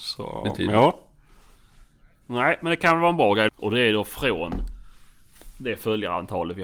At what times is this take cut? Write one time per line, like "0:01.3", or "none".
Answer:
0:03.5